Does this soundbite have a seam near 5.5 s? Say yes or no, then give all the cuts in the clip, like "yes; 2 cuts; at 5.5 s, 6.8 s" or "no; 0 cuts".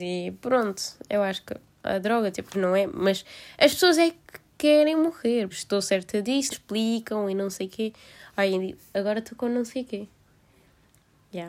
yes; 3 cuts; at 2.5 s, 5.5 s, 6.5 s